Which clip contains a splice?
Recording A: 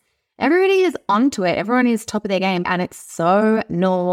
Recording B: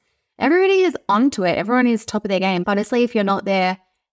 A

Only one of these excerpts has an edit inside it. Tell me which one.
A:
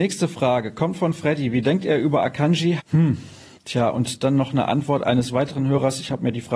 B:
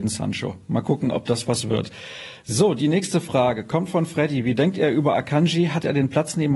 A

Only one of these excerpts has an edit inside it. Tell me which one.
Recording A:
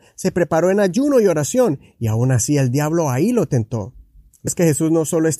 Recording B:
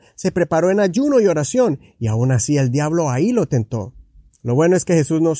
A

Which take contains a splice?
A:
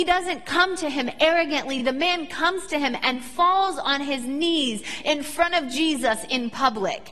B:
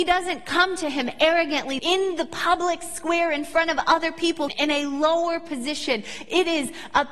B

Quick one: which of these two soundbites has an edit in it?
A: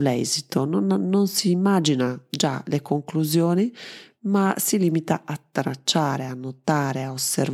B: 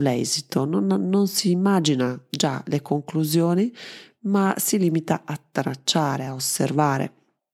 B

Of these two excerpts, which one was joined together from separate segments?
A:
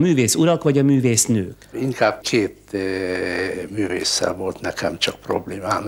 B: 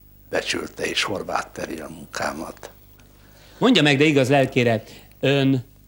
A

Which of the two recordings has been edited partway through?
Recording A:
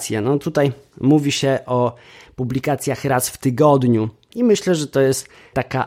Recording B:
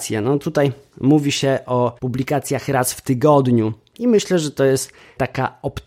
B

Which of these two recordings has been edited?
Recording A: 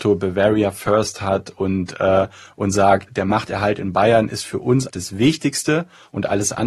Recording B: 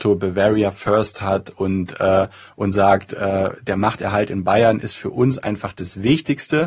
A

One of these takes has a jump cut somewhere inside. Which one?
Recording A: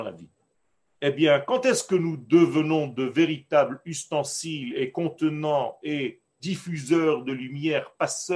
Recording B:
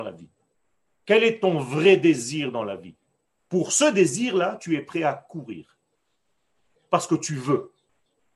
A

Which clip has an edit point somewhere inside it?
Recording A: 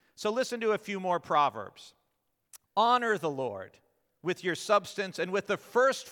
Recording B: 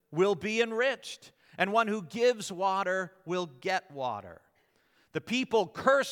A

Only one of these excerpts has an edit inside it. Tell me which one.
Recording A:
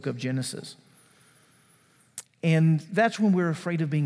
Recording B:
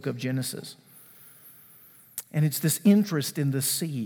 A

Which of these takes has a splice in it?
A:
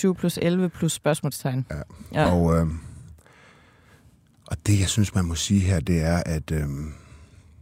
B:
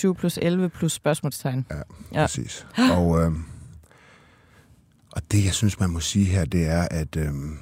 A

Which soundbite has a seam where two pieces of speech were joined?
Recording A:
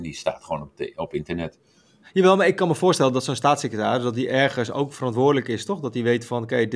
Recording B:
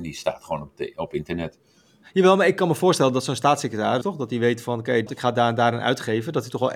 B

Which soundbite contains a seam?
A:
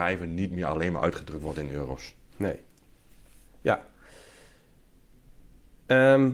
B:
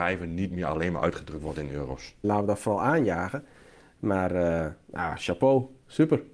B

